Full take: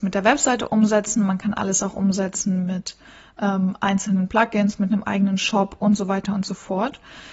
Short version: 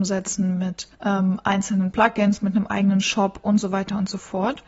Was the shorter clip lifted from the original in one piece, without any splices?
no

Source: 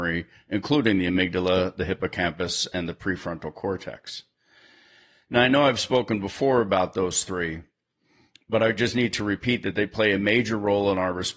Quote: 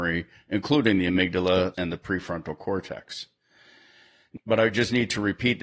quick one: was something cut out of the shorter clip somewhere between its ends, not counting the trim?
yes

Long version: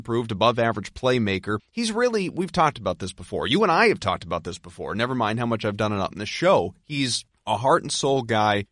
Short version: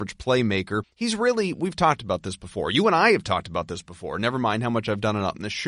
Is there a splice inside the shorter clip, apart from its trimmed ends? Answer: no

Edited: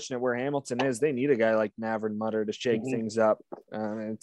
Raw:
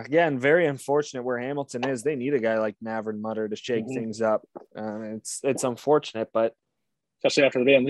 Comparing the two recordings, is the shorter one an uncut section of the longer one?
yes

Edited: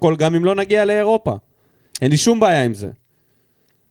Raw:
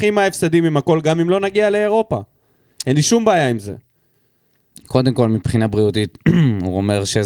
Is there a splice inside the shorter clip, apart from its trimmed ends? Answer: no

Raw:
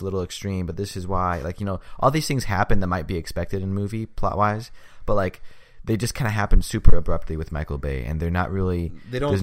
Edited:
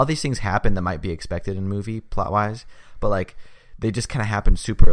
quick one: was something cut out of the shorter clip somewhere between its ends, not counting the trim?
no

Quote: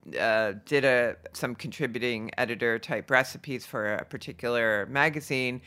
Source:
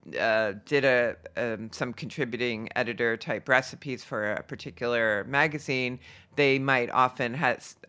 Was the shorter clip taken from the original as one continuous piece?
no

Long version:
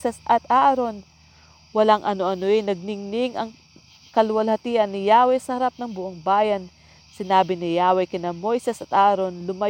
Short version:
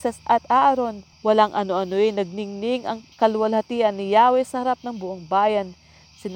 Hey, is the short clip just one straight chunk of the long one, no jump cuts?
no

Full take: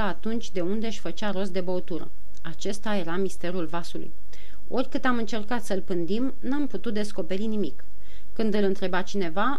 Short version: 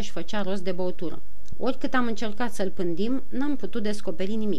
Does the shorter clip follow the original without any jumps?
no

